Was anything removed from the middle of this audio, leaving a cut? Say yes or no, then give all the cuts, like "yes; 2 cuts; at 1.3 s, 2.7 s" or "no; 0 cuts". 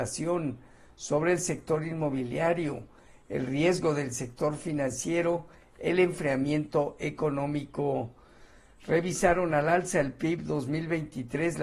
no; 0 cuts